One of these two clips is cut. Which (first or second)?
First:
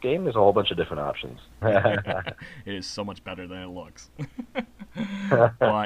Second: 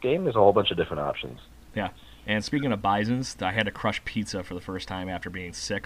first